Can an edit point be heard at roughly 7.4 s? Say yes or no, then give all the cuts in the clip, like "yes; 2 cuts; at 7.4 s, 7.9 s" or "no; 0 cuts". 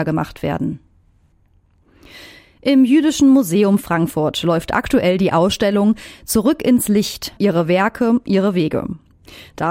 yes; 1 cut; at 7.4 s